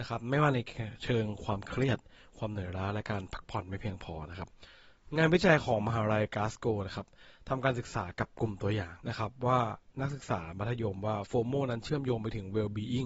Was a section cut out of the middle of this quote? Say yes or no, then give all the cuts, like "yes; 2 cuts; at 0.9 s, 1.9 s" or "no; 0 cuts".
yes; 1 cut; at 9.0 s